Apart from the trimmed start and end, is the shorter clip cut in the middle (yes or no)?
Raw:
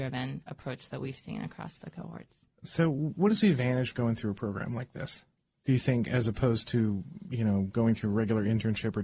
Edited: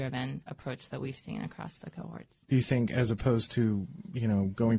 yes